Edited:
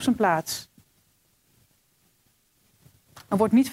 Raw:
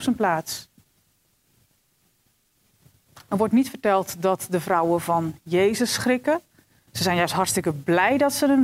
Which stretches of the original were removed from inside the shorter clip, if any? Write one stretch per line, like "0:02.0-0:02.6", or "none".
none